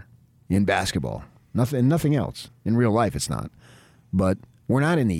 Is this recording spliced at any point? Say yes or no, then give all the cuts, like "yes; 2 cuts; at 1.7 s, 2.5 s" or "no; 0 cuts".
no; 0 cuts